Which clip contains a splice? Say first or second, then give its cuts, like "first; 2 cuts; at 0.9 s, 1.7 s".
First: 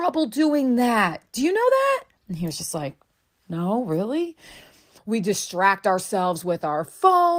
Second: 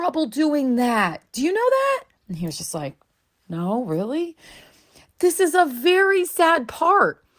first; 1 cut; at 5.0 s